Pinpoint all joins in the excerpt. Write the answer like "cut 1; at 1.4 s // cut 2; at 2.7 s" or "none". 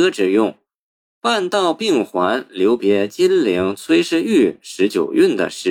none